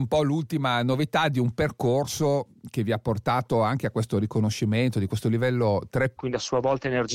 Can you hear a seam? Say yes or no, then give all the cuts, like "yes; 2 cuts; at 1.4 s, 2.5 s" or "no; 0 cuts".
yes; 1 cut; at 6.2 s